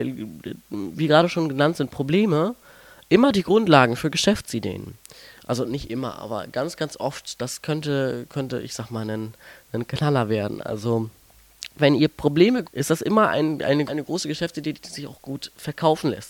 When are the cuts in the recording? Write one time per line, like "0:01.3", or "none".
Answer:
0:12.6
0:13.9